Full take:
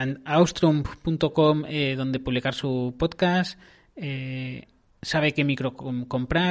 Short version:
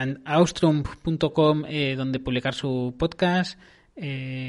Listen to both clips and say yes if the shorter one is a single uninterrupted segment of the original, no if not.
yes